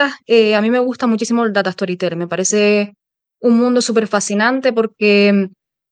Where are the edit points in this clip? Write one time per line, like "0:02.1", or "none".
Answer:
none